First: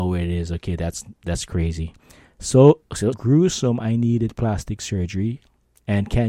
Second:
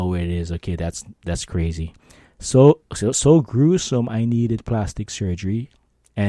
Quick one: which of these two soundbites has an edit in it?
first; 1 cut; at 3.1 s

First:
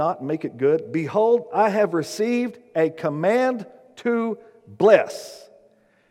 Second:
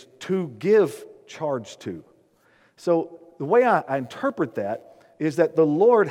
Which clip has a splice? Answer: second; 1 cut; at 3.8 s

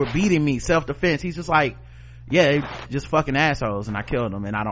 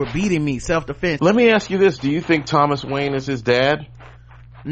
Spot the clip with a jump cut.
second; 1 cut; at 1.2 s

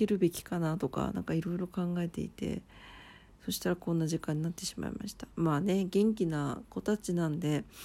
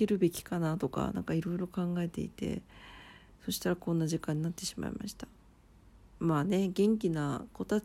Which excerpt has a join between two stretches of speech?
first; 1 cut; at 5.3 s

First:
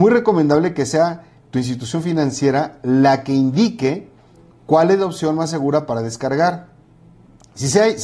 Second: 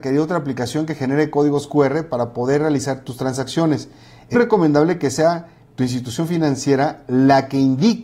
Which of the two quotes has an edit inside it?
second; 1 cut; at 4.3 s

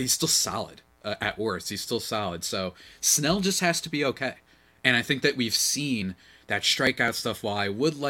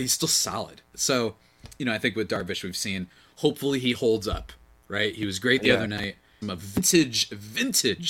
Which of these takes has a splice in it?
second; 2 cuts; at 0.9 s, 6.4 s

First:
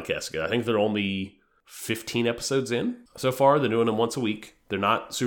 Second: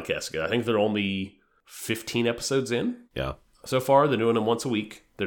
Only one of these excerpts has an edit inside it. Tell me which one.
first; 1 cut; at 3.1 s

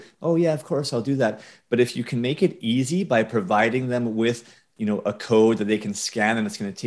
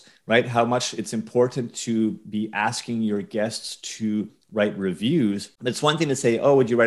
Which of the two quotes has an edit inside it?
second; 1 cut; at 5.6 s

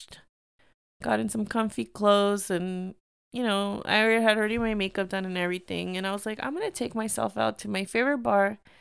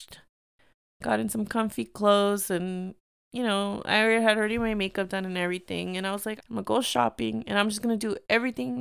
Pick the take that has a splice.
second; 1 cut; at 6.4 s

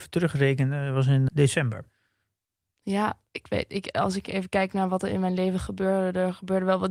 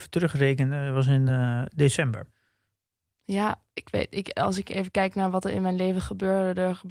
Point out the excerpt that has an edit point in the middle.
first; 1 cut; at 1.3 s

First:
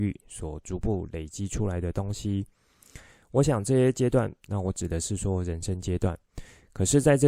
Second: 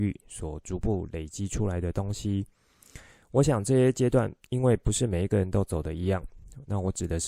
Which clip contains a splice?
first; 1 cut; at 4.5 s

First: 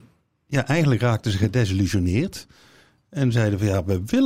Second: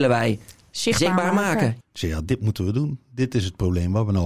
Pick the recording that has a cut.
second; 1 cut; at 1.8 s

